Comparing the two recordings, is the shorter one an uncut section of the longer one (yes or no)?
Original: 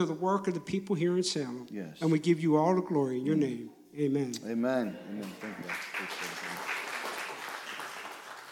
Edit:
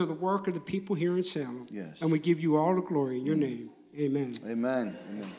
yes